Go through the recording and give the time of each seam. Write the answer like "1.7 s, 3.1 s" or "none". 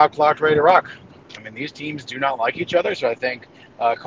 1.4 s